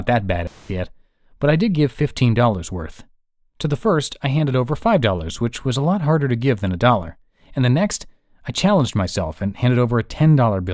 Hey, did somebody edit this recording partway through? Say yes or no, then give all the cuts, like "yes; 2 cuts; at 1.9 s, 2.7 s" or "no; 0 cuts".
no; 0 cuts